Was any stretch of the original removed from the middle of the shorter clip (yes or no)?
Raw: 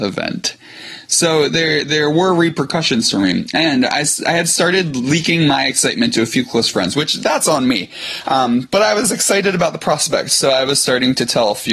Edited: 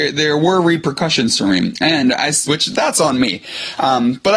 yes